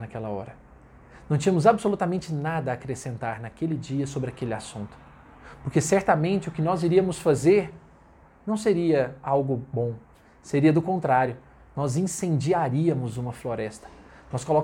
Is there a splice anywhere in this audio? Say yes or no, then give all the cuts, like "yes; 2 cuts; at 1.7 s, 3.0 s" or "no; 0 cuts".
no; 0 cuts